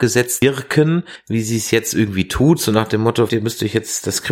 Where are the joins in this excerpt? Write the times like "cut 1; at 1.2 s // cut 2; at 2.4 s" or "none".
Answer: cut 1; at 3.3 s